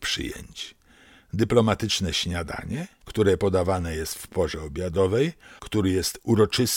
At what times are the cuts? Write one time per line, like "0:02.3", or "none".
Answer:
0:05.6